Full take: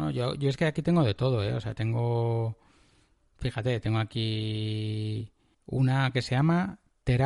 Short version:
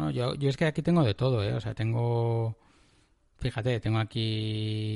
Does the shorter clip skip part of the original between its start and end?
no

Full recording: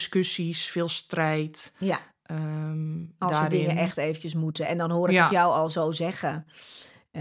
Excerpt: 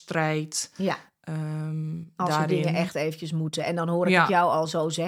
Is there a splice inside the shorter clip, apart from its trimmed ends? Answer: no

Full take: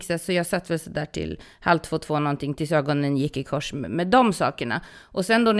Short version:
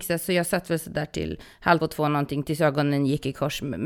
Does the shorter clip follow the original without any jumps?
no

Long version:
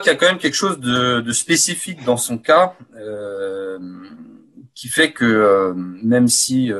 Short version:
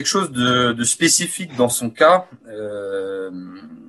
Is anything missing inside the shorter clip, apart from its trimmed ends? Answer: no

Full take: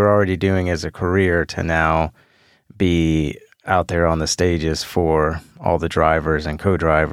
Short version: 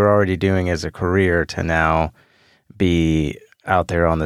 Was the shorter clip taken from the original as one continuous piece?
yes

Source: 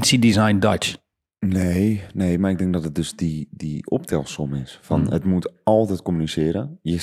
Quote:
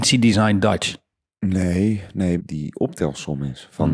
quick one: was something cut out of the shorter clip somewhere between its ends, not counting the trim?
yes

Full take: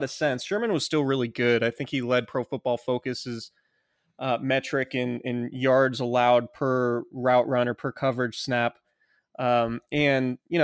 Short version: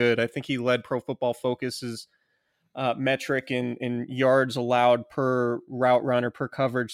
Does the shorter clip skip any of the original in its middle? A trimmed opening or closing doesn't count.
no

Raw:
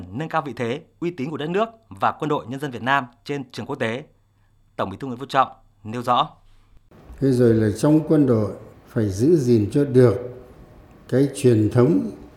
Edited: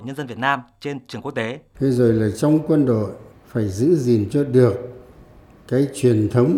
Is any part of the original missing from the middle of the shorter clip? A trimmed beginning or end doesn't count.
yes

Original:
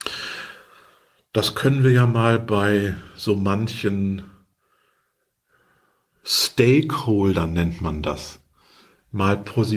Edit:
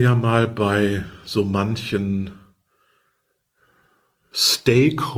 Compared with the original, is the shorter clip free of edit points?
yes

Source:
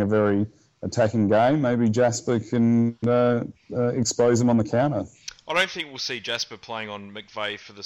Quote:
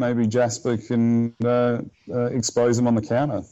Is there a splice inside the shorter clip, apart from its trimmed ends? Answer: no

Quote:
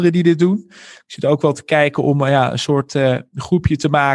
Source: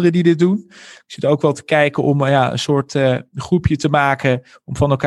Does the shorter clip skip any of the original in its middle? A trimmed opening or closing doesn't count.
no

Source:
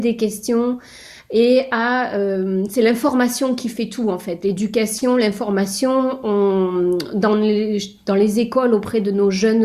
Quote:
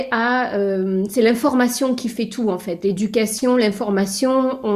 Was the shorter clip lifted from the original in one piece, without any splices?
yes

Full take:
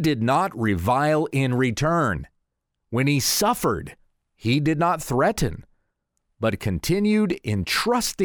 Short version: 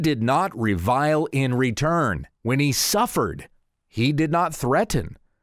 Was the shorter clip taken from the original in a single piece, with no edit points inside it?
no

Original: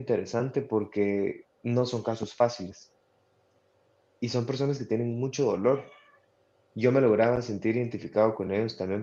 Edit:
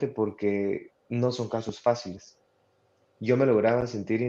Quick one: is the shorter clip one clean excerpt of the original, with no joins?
no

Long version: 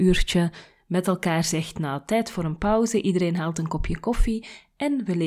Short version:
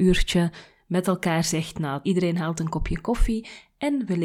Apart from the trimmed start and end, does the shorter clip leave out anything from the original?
yes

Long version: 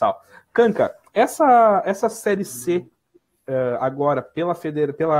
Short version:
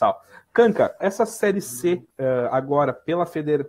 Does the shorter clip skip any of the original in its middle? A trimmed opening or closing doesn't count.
yes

